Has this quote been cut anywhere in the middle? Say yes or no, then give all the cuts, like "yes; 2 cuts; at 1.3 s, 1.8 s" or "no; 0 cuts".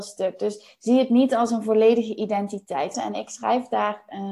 yes; 1 cut; at 2.9 s